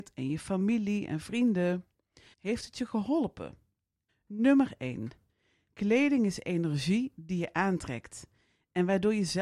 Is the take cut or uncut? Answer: cut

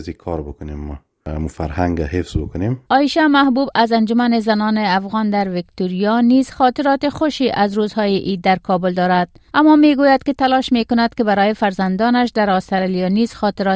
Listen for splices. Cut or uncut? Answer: cut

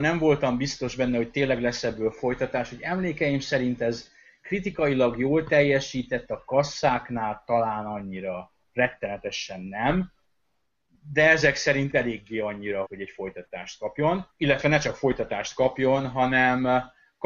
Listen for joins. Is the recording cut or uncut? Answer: cut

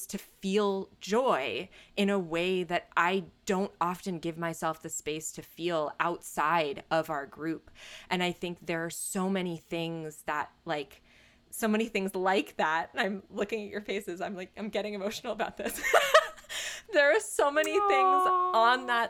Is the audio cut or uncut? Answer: uncut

